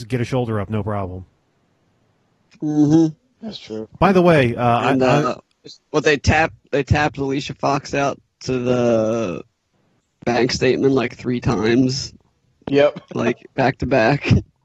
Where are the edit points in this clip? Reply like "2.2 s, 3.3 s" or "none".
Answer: none